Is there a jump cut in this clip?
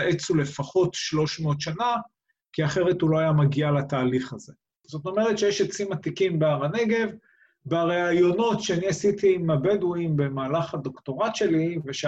no; 0 cuts

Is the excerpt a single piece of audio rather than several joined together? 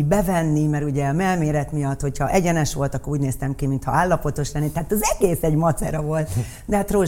yes; 0 cuts

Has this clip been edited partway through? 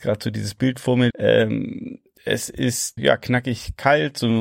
yes; 2 cuts; at 1.1 s, 3.0 s

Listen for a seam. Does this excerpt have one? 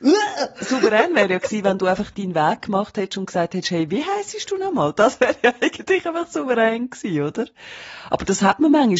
no; 0 cuts

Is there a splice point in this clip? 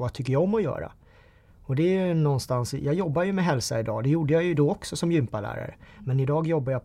no; 0 cuts

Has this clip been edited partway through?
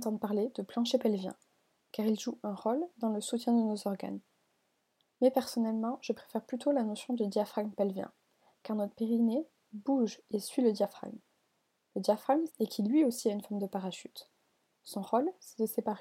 yes; 1 cut; at 12.5 s

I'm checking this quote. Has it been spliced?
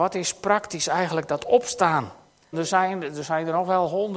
yes; 1 cut; at 2.5 s

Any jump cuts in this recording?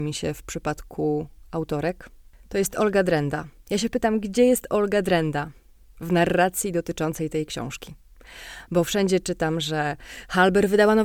no; 0 cuts

